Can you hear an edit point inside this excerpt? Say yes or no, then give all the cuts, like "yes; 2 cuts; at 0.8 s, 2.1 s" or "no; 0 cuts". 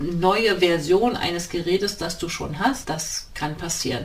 yes; 1 cut; at 2.8 s